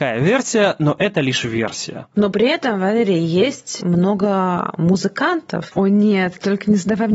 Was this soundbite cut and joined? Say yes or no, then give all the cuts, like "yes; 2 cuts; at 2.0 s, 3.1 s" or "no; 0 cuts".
yes; 2 cuts; at 2.1 s, 5.7 s